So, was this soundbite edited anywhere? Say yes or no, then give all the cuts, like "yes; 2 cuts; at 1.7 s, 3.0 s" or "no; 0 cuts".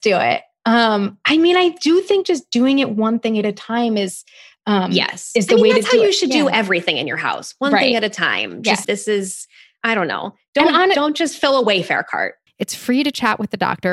yes; 2 cuts; at 8.8 s, 12.5 s